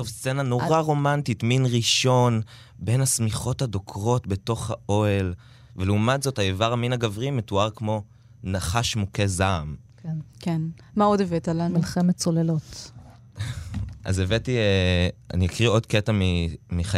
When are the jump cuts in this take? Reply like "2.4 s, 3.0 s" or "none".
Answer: none